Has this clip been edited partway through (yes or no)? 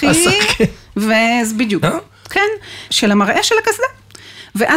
yes